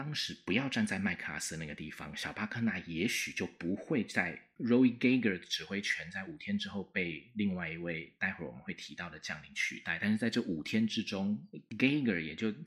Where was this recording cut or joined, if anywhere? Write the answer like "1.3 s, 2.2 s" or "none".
4.5 s